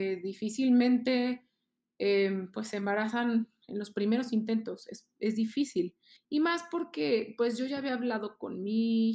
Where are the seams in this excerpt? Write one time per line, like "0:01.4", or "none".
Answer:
0:06.2